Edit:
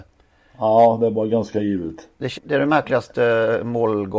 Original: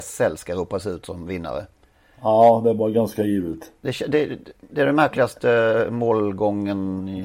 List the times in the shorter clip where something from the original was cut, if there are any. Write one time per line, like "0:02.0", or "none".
0:02.4